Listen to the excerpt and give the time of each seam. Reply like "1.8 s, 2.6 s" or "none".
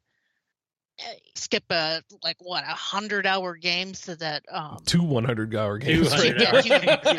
1.4 s